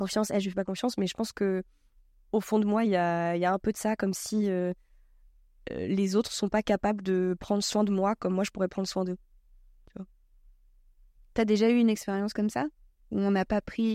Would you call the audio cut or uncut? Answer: uncut